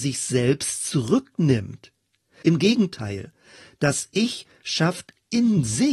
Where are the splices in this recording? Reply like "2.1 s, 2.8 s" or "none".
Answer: 2.4 s